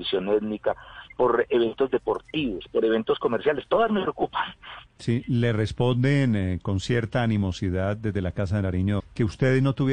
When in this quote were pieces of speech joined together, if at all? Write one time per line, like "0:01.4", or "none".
0:04.9
0:09.0